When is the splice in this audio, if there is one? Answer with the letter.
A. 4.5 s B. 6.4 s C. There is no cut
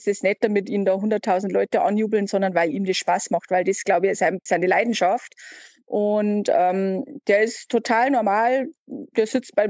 A